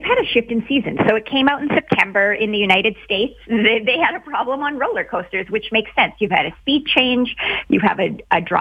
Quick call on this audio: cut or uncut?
uncut